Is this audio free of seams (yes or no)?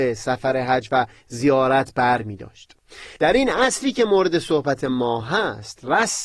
no